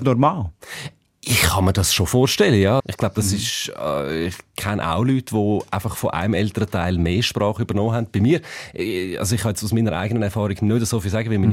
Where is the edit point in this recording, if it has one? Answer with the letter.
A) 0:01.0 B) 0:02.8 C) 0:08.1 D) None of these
B